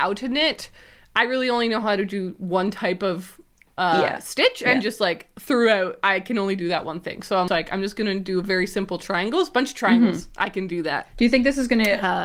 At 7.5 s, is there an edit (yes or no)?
yes